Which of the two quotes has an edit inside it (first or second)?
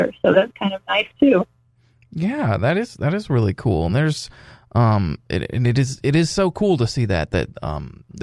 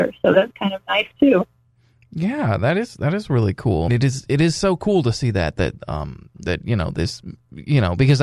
second